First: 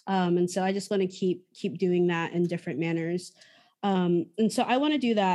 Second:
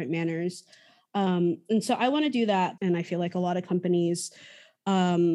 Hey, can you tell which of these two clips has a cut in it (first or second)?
second